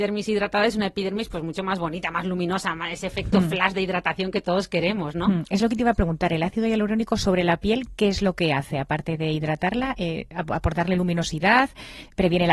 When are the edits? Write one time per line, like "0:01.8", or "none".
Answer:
none